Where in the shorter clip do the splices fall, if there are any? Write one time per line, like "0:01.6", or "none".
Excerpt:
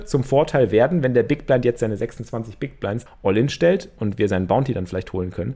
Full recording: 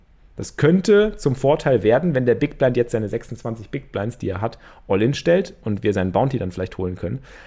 0:03.1

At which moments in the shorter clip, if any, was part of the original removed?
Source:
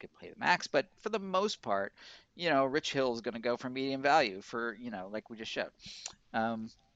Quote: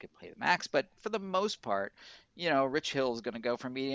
none

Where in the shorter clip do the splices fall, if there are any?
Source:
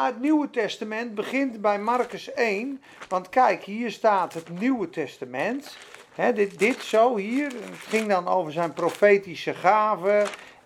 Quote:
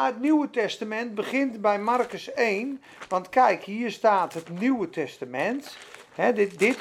none

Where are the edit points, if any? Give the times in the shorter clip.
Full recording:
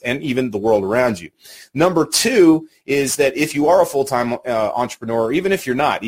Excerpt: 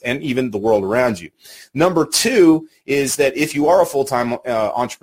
none

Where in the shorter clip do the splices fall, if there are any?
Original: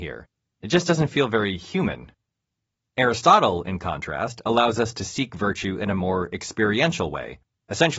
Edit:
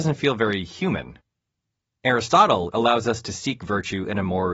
0:02.7

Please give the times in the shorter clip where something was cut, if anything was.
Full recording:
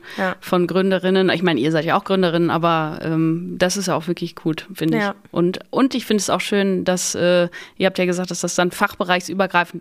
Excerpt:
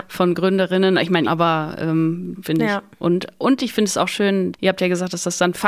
0:01.3
0:02.3
0:04.5

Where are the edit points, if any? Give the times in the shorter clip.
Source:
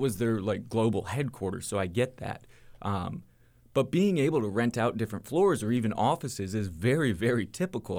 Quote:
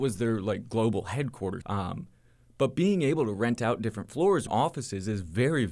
0:01.6
0:04.5

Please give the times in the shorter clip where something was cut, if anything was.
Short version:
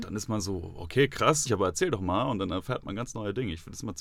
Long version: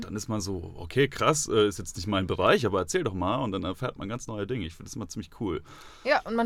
0:01.5

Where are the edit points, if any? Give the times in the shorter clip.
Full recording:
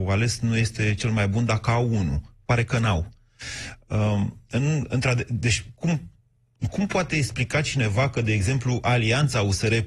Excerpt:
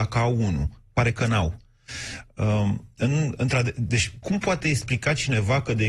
0:04.2

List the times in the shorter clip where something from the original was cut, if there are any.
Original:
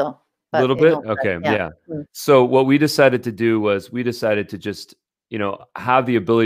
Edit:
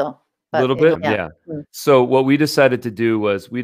0:01.0

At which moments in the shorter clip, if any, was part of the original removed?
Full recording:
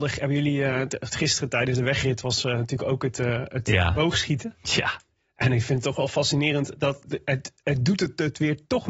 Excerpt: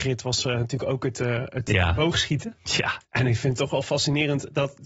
0:03.0

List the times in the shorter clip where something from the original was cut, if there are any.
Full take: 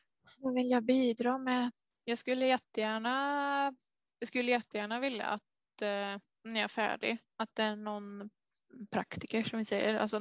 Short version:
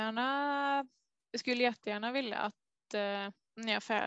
none

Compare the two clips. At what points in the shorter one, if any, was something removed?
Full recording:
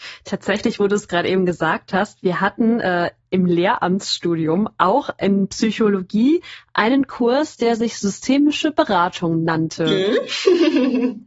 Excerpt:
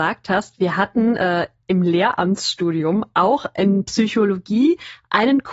none

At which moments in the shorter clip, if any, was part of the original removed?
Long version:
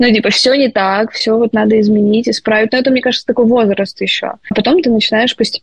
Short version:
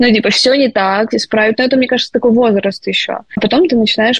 0:01.1

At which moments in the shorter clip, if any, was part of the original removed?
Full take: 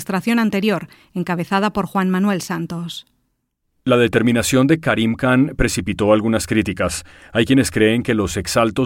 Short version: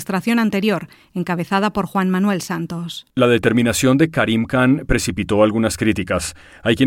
0:03.1

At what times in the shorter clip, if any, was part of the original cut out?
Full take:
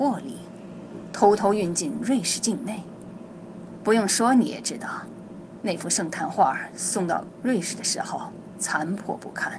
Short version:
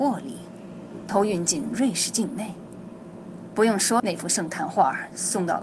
0:01.1
0:04.0

